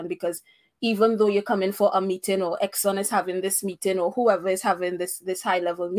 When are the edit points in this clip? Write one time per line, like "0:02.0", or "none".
none